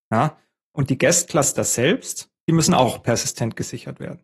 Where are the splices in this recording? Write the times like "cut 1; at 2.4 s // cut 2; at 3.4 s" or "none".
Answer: cut 1; at 2.4 s